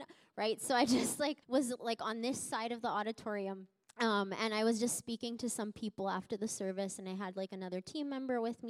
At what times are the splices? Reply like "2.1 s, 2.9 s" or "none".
1.4 s